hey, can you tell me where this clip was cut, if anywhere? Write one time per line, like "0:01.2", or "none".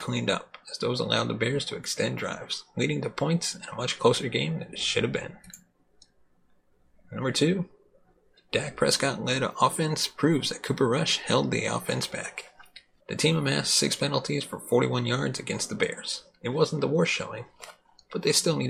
0:13.0